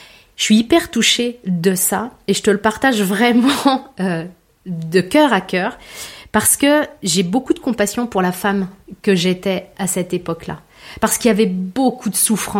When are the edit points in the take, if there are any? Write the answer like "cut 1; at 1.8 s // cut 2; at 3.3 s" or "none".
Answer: none